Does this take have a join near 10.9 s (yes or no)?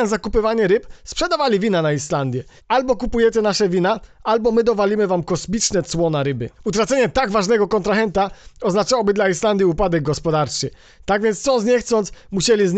no